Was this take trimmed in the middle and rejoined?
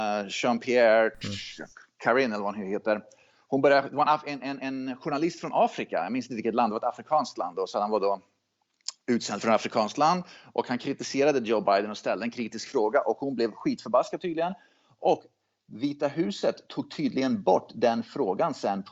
no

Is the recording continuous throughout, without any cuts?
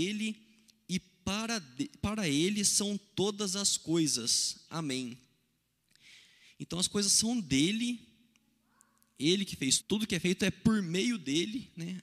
no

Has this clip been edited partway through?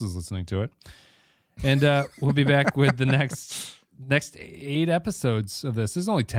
no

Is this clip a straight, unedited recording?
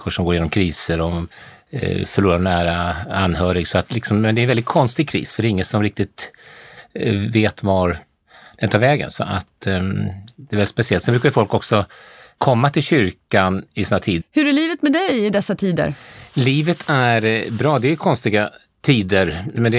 no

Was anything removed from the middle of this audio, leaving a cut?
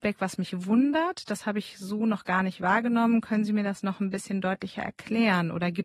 no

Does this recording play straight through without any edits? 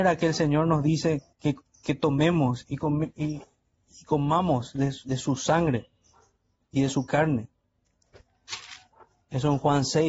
no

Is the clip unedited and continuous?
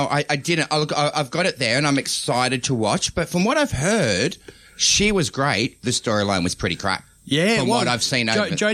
yes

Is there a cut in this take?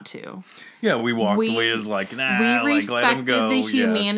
no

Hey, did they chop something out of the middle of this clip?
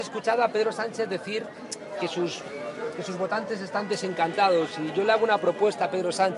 no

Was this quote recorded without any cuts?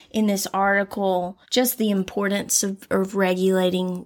no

